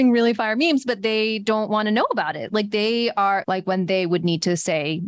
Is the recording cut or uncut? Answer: cut